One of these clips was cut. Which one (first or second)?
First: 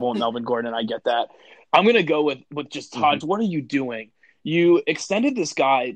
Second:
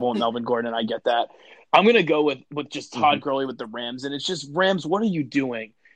first